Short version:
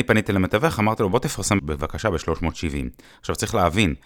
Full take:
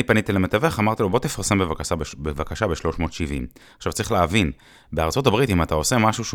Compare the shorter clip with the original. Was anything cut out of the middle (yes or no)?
yes